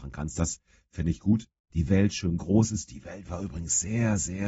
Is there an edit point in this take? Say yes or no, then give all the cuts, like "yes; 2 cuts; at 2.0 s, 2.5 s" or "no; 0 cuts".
yes; 1 cut; at 1.7 s